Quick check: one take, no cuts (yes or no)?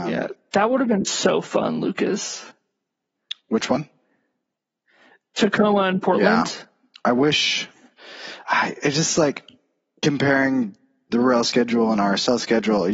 yes